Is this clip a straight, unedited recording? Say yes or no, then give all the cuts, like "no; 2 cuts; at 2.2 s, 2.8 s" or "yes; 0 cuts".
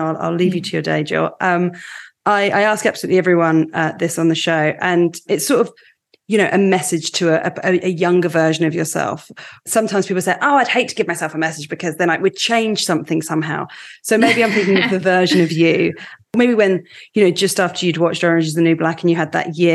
yes; 0 cuts